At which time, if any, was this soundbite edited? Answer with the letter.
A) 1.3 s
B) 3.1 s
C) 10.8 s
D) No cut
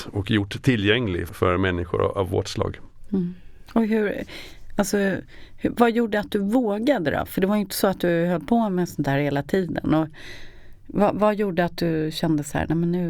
A